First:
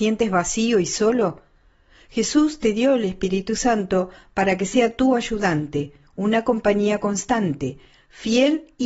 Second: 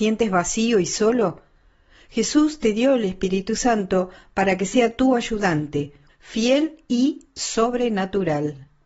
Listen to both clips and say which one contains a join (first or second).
second